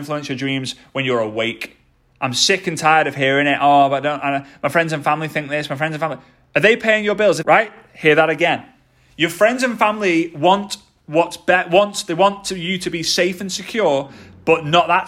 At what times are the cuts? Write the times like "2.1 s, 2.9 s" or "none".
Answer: 7.4 s

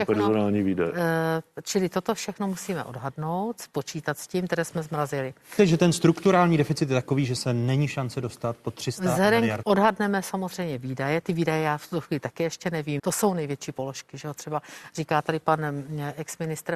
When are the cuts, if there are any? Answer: 5.6 s, 9.6 s, 13.0 s

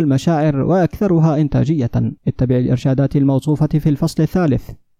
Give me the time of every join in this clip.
2.2 s

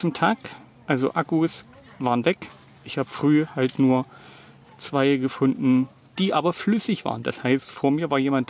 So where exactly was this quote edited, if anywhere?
6.2 s

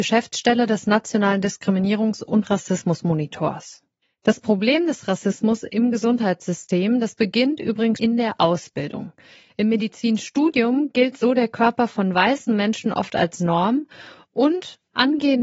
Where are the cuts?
8.0 s

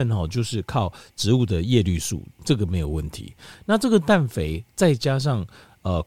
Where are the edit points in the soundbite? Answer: 3.5 s

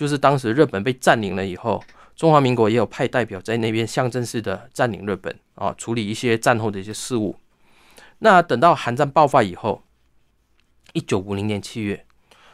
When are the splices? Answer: none

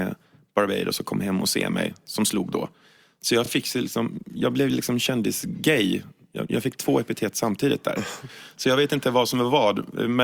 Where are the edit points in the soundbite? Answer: none

